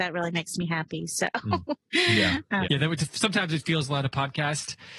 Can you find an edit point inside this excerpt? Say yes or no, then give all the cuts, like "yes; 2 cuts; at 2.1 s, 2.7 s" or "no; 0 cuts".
yes; 1 cut; at 2.6 s